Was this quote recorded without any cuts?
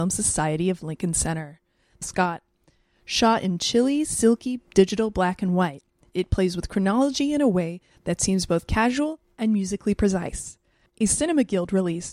no; 1 cut; at 2.0 s

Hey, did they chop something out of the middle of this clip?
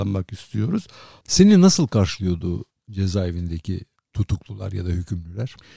yes; 1 cut; at 1.2 s

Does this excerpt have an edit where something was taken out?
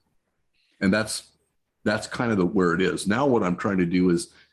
no; 0 cuts

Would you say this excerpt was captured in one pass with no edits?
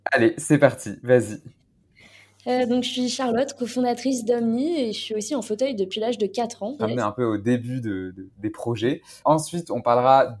no; 2 cuts; at 6.8 s, 9.2 s

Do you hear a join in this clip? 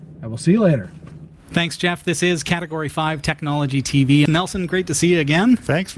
yes; 1 cut; at 4.3 s

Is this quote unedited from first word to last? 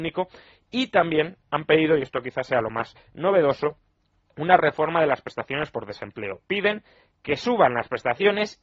yes; 0 cuts

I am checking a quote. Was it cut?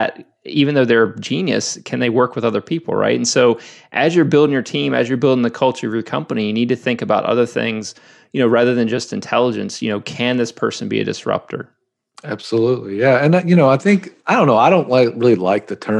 no; 0 cuts

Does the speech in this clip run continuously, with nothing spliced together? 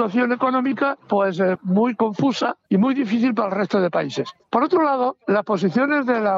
no; 1 cut; at 1.6 s

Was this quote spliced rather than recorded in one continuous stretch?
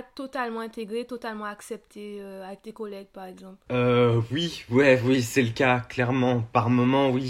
no; 0 cuts

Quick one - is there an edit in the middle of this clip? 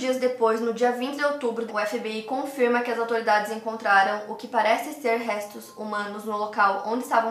yes; 1 cut; at 1.7 s

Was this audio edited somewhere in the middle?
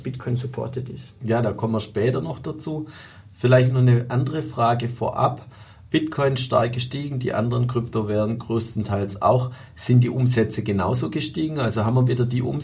no; 0 cuts

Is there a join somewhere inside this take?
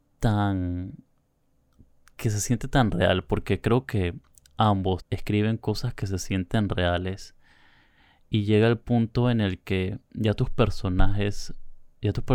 yes; 1 cut; at 5.0 s

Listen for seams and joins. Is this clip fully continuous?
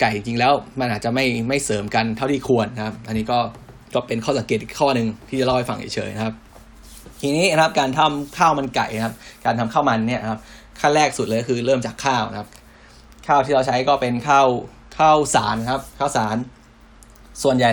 no; 1 cut; at 3.8 s

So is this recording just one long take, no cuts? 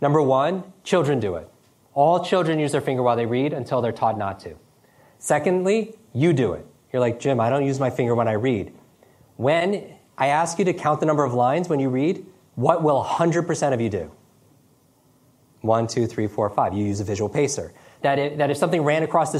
no; 1 cut; at 18.0 s

